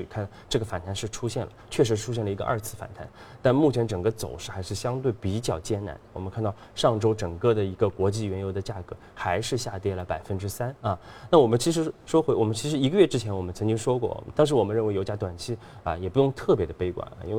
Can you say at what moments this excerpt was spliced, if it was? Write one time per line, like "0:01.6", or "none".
0:11.3
0:14.3